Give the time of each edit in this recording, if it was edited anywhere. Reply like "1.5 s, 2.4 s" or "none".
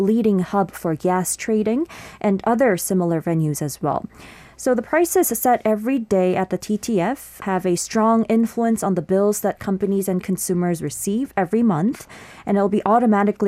7.4 s